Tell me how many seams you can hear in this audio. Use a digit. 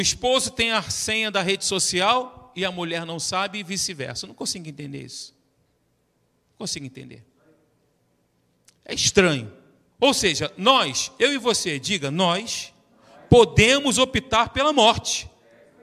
1